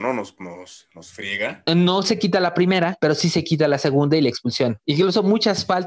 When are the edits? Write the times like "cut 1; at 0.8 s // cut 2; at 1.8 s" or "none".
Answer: cut 1; at 1.7 s // cut 2; at 4.8 s